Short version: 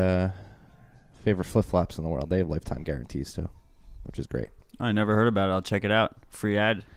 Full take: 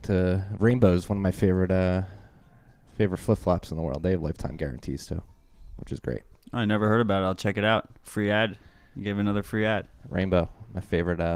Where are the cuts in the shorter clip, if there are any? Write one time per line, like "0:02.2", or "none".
none